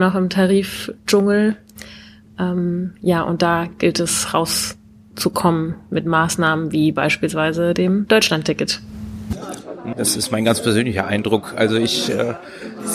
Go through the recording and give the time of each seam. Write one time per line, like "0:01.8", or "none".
0:09.9